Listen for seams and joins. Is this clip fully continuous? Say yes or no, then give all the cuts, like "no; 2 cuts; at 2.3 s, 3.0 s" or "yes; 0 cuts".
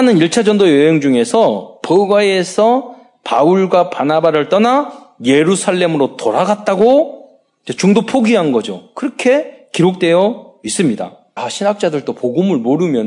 no; 1 cut; at 11.4 s